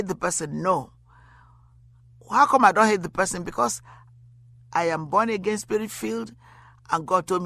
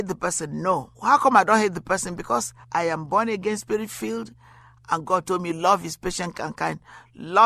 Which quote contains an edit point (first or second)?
second